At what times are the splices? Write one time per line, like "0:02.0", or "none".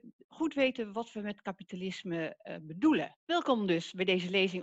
0:03.2